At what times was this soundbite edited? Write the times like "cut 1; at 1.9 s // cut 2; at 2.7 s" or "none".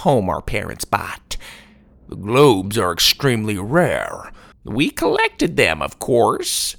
cut 1; at 1.9 s // cut 2; at 4.5 s